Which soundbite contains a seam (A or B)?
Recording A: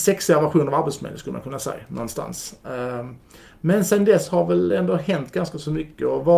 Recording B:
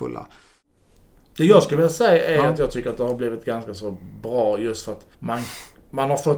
B